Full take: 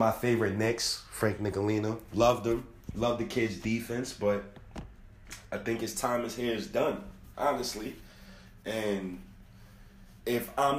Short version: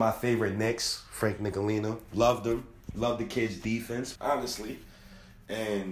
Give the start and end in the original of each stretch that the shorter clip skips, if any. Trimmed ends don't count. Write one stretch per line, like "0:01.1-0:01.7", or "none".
0:04.2-0:07.3